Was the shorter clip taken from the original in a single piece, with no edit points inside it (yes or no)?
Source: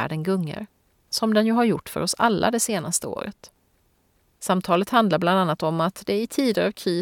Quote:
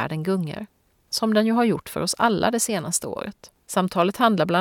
no